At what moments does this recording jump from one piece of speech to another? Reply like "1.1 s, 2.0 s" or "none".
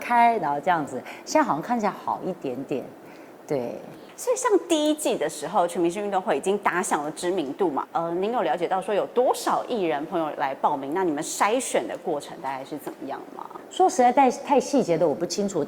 7.8 s

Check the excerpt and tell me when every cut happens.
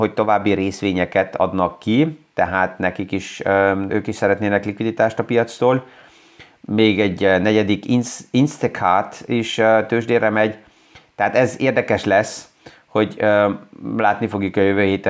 3.9 s

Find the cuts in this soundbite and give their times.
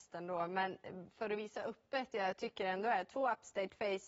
none

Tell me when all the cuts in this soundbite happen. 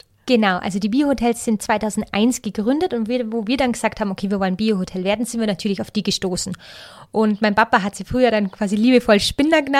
none

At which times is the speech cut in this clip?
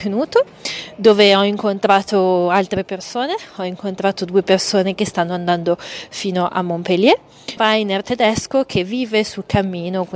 7.6 s

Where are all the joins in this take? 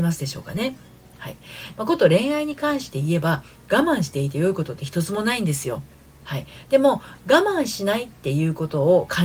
1.7 s

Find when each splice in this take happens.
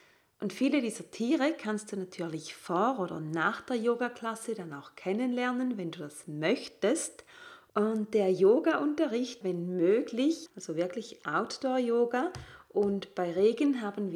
7.7 s, 9.4 s, 10.5 s

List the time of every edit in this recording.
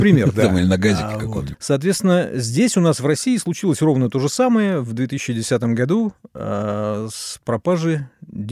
1.5 s

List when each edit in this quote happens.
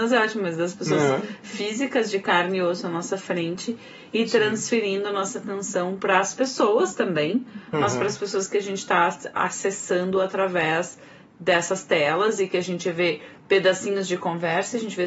none

